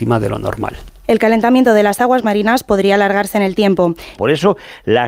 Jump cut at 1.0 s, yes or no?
no